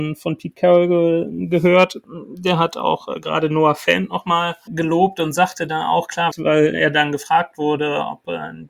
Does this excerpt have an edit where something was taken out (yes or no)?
yes